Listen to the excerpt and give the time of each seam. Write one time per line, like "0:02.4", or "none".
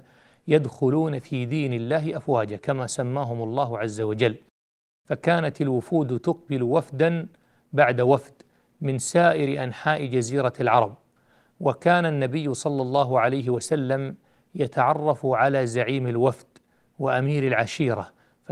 none